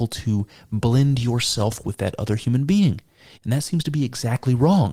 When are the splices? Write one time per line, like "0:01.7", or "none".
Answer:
0:03.3